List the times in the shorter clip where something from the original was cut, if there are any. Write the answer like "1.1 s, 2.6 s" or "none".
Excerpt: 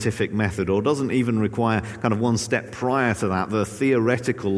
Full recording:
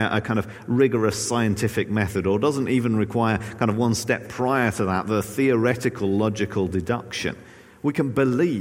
none